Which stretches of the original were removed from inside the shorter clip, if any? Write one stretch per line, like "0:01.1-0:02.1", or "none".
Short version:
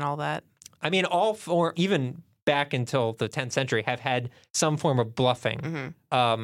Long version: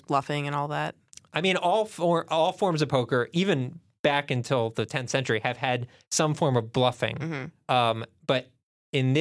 0:02.3-0:03.3